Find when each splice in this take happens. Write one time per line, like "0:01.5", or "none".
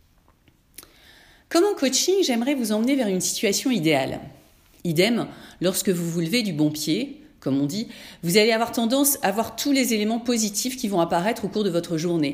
0:04.8